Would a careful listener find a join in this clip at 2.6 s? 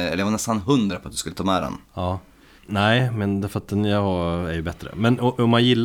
yes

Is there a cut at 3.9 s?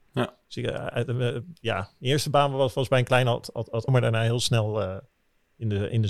yes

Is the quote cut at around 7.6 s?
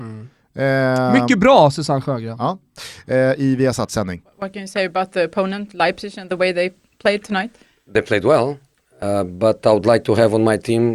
no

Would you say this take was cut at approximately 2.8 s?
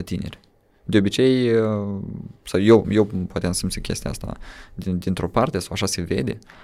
yes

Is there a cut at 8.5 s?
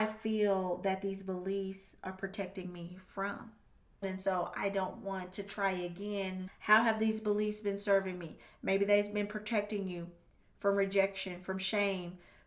no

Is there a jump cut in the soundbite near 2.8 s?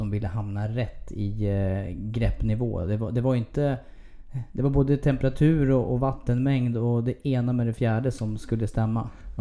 no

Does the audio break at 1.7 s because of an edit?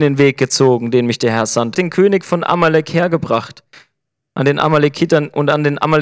yes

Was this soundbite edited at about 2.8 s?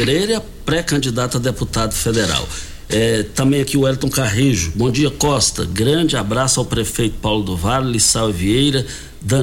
no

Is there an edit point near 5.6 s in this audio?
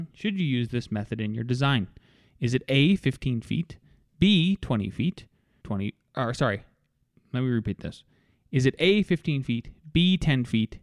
yes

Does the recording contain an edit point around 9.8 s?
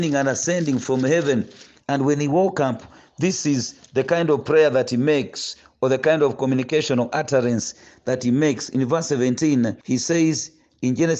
yes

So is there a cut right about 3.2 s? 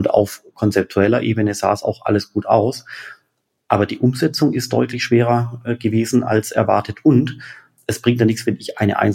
no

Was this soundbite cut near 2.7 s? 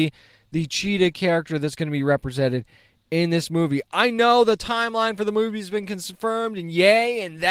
no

